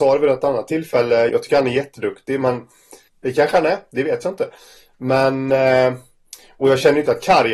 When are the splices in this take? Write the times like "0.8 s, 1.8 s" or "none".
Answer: 1.3 s, 3.1 s